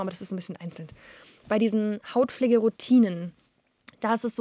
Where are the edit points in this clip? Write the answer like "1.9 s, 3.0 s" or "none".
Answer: none